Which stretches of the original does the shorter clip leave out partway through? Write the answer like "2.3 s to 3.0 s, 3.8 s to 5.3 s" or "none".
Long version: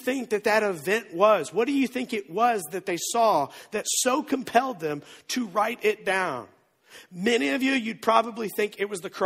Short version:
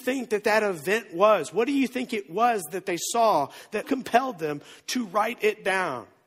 3.8 s to 4.2 s